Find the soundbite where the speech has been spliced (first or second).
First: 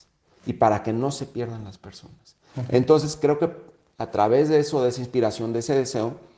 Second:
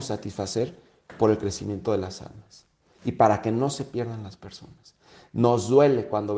first